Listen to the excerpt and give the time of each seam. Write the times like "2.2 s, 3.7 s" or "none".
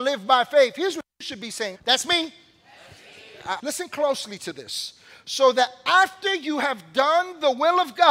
1.7 s, 3.6 s